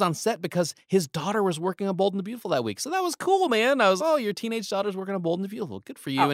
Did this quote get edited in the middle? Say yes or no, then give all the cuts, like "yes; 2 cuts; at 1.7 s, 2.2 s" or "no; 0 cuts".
yes; 1 cut; at 4.0 s